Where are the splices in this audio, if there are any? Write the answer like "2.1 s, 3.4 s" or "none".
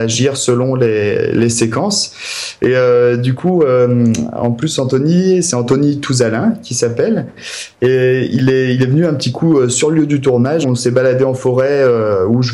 2.6 s, 10.6 s